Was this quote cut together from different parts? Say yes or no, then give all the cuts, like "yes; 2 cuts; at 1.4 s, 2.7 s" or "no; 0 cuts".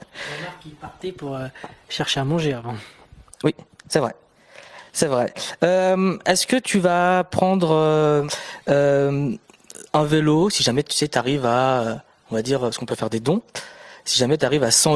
no; 0 cuts